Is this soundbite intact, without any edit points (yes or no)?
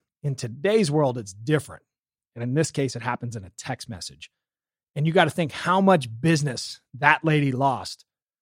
yes